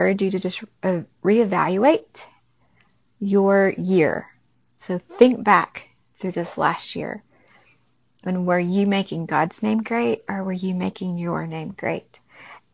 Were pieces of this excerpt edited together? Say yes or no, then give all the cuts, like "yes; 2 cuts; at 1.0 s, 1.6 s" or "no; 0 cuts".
no; 0 cuts